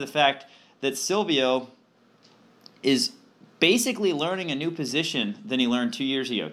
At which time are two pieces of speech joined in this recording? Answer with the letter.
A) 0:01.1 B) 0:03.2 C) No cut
C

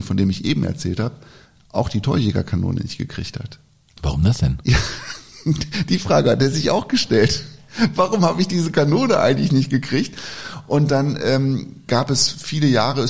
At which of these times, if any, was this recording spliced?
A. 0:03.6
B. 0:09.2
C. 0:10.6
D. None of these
D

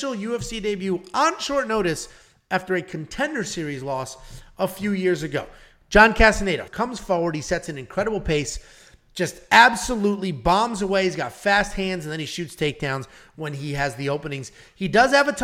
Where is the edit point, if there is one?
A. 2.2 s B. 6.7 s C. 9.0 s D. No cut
B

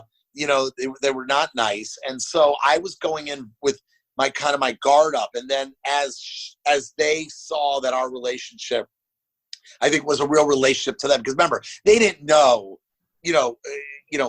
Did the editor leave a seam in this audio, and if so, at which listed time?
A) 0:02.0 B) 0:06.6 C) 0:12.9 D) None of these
B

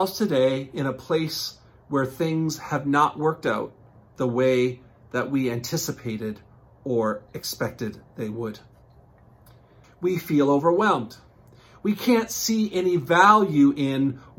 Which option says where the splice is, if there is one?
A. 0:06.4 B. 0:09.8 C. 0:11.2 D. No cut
B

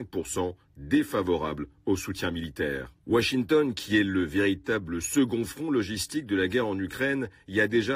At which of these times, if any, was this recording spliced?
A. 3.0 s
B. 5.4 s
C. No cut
A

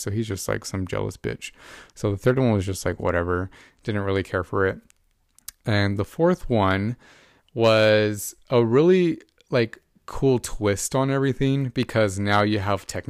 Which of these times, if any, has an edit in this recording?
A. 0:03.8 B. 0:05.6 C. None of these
C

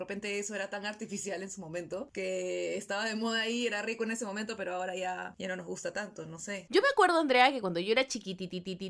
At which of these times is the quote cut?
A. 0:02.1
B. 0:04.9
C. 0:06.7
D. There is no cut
D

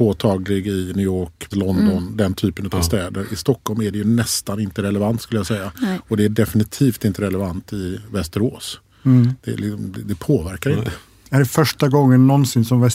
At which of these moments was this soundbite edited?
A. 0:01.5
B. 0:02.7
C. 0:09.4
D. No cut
A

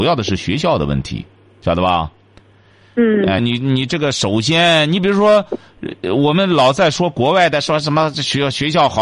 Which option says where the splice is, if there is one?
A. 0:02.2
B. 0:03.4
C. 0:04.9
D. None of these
B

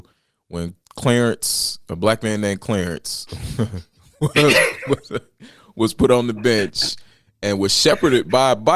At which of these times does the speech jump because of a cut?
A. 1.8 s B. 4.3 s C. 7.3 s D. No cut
D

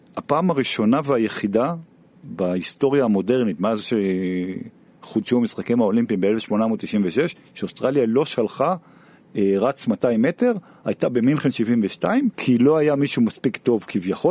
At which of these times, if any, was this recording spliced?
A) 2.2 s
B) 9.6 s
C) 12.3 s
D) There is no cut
C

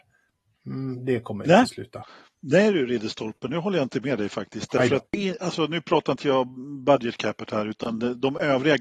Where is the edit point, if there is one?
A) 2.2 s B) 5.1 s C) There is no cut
B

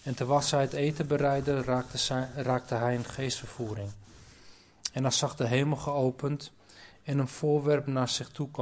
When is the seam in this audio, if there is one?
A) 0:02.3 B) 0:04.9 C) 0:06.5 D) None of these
D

